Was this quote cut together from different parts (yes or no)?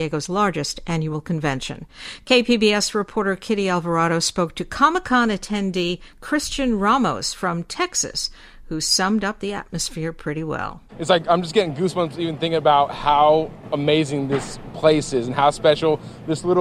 yes